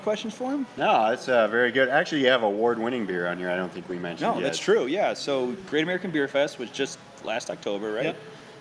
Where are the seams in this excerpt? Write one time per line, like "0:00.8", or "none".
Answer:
none